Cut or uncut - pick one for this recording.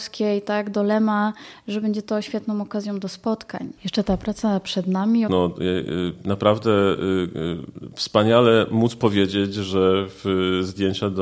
cut